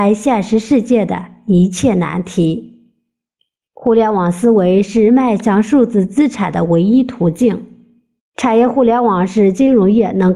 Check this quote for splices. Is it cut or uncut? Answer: cut